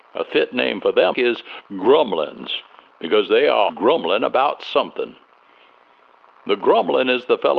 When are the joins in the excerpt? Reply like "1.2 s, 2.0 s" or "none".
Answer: 1.1 s, 3.7 s